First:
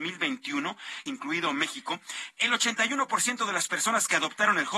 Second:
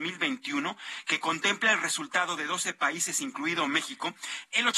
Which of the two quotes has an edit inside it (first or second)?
first